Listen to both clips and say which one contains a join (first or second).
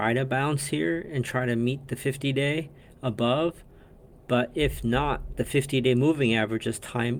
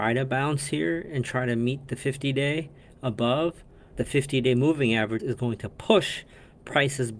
second